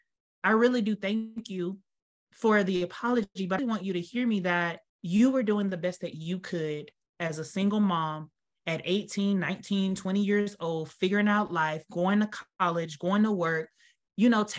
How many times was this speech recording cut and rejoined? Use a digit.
2